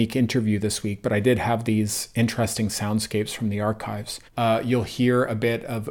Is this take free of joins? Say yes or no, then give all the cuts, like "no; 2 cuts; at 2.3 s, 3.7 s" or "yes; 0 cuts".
no; 1 cut; at 4.3 s